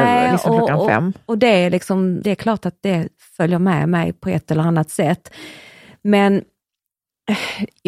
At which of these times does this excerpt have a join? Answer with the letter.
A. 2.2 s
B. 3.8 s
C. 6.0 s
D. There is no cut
A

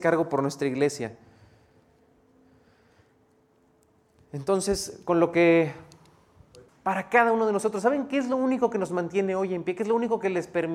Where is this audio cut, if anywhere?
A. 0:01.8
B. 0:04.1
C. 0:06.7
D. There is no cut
C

